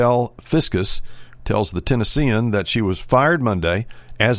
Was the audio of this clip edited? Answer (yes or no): yes